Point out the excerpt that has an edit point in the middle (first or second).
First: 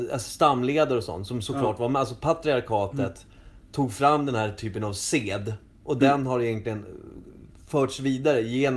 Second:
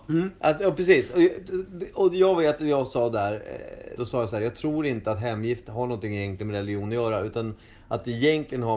second